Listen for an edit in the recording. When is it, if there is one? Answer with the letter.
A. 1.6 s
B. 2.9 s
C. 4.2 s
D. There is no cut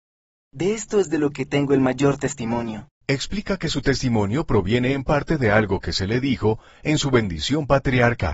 B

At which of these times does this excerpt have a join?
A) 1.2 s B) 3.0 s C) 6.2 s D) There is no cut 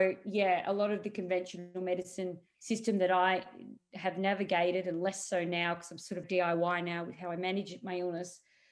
C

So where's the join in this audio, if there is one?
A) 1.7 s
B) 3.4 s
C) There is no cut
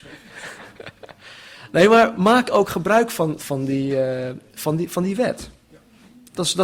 B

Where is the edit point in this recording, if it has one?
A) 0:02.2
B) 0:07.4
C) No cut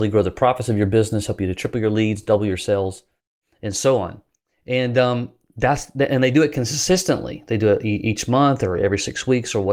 C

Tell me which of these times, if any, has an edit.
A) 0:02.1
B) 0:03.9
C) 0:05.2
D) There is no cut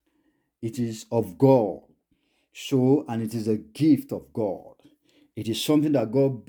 D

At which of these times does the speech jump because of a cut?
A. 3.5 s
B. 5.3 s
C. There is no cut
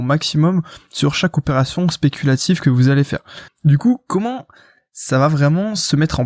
A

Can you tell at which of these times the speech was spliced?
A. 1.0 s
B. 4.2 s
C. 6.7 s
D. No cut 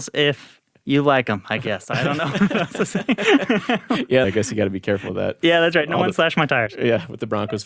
B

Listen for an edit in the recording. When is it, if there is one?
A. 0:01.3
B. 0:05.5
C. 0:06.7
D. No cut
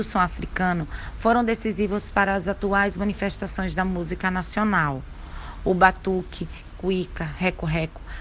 C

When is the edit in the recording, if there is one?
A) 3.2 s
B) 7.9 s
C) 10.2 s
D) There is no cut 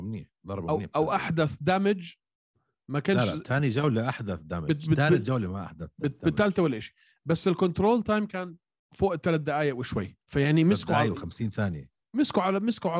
C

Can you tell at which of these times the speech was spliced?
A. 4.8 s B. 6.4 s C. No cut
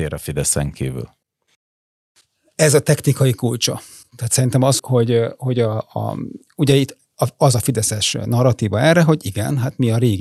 A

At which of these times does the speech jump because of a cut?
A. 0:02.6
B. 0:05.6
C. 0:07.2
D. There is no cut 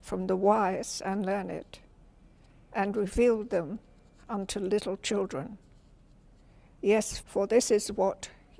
C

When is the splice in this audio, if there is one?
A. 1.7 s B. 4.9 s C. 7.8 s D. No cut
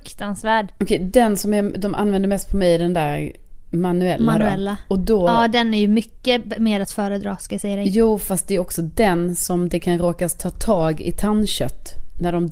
D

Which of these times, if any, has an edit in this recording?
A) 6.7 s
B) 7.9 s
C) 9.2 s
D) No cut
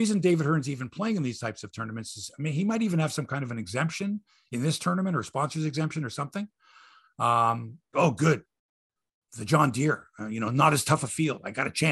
B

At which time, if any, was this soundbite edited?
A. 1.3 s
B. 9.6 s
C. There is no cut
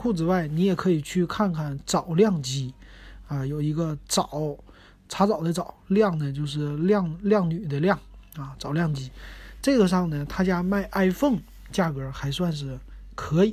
C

